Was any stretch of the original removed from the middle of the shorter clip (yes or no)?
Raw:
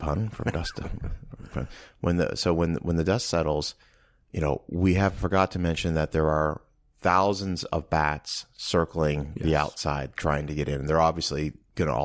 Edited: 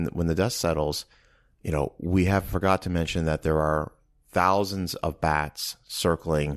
no